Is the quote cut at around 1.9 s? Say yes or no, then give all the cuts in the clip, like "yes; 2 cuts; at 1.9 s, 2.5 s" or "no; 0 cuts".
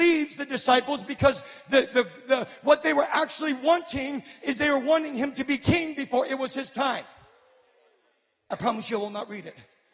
no; 1 cut; at 8.5 s